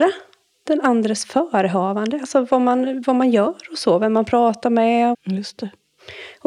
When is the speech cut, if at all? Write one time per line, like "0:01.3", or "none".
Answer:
0:05.1